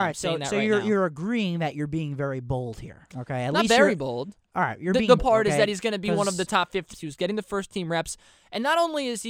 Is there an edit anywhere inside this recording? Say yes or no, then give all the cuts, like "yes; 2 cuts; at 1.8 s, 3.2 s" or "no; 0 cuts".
yes; 2 cuts; at 5.2 s, 6.9 s